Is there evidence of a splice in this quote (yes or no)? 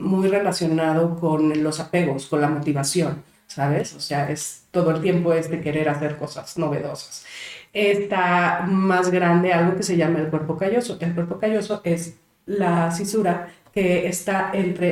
no